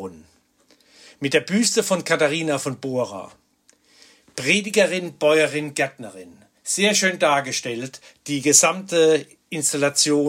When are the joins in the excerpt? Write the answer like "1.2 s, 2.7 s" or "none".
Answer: none